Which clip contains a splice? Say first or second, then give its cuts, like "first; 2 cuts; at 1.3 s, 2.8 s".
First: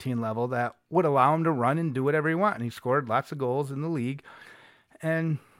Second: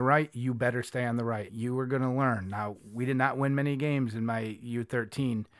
second; 1 cut; at 1.5 s